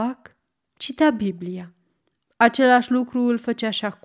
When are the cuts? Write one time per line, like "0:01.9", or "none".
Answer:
none